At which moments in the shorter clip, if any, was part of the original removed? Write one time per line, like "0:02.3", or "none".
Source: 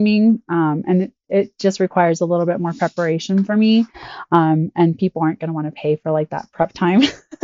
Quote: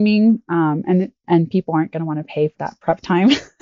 0:01.2
0:02.6